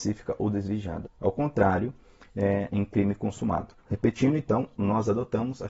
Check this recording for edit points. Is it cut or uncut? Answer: cut